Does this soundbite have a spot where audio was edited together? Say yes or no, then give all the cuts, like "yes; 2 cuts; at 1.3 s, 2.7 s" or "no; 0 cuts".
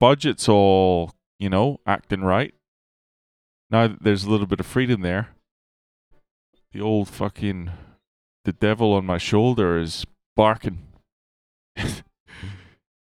no; 0 cuts